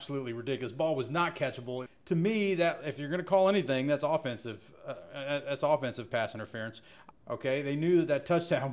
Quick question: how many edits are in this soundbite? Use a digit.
2